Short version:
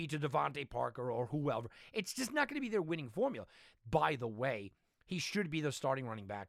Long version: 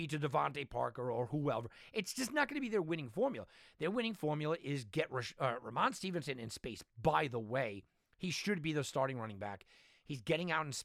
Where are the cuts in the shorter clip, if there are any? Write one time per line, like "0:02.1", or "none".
0:03.8